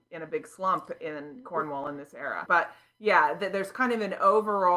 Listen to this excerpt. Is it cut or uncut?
cut